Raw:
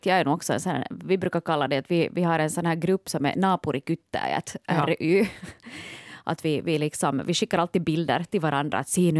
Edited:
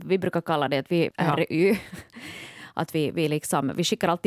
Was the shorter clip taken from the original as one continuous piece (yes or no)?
no